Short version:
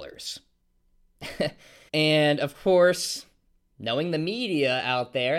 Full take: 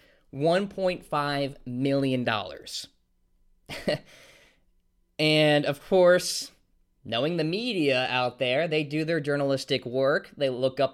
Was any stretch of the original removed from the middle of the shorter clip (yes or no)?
yes